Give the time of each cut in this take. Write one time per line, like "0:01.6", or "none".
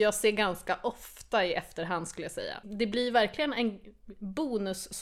0:02.6